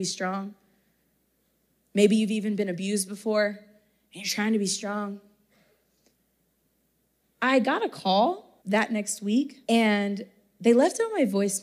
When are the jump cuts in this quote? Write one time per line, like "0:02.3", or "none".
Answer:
0:07.2
0:08.6
0:09.6